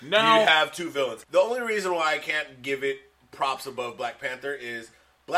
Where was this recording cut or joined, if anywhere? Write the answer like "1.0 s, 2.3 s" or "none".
1.2 s

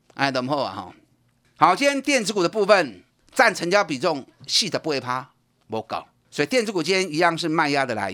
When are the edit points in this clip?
none

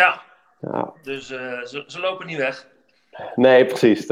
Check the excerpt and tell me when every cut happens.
0.9 s

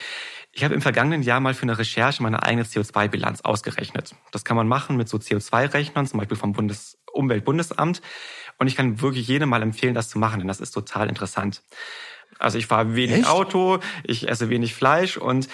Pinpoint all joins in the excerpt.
12.2 s

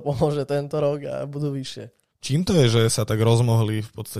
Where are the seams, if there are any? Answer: 2.1 s

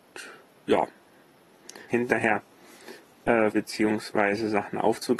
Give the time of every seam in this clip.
1.9 s, 3.5 s

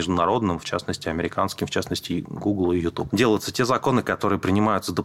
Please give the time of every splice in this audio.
3.1 s

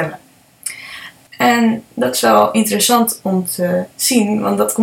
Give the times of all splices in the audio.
1.3 s

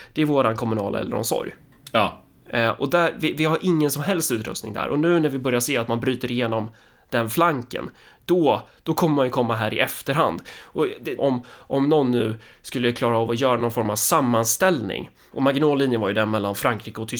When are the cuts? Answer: 11.2 s, 15.3 s

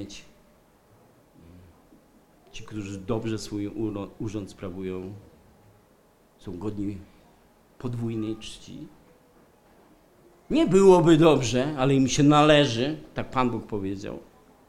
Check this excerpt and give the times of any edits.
none

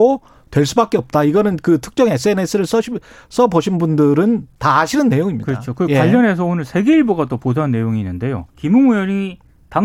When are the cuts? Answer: 8.5 s

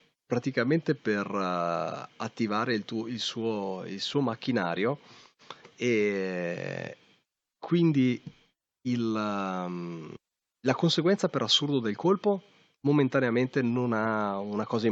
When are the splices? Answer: none

